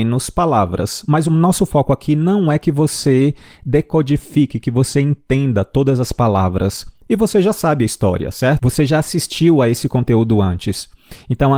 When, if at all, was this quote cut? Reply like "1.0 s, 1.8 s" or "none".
7.0 s